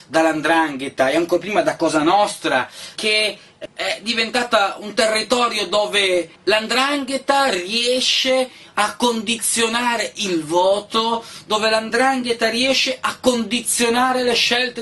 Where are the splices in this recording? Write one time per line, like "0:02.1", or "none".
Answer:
0:03.0
0:06.4